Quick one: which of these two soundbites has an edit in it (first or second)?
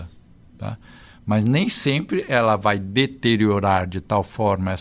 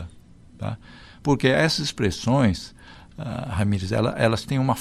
second